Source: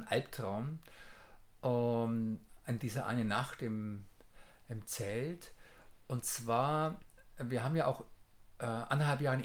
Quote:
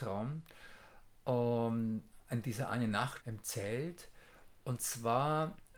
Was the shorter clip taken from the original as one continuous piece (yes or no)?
no